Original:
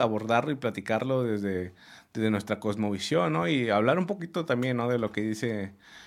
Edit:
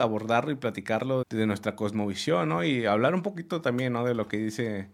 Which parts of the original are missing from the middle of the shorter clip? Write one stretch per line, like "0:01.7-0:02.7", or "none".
0:01.2-0:02.1